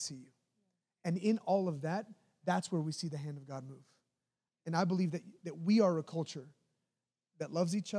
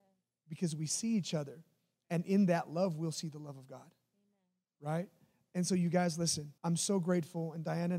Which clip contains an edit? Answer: second; 1 cut; at 6.6 s

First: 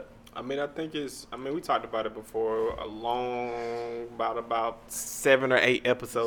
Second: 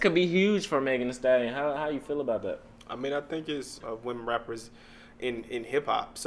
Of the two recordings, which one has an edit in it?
second; 1 cut; at 3.8 s

